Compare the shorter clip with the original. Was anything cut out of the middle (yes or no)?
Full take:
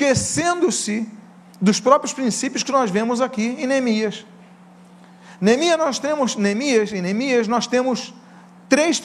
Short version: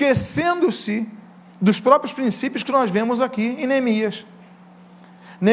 no